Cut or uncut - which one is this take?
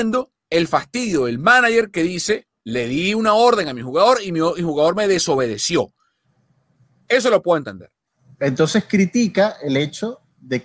uncut